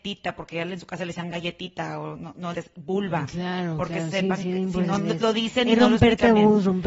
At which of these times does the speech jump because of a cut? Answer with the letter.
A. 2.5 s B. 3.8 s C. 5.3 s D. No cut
A